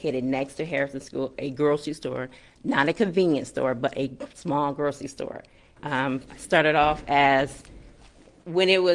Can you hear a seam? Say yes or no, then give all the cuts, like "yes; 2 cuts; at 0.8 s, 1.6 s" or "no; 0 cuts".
yes; 1 cut; at 5.8 s